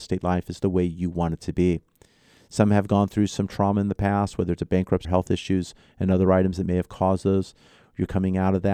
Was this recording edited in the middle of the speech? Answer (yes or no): yes